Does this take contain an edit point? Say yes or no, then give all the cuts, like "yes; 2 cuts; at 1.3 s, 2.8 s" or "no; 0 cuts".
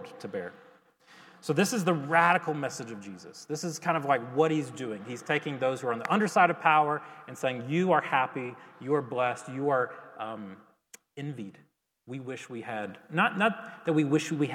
no; 0 cuts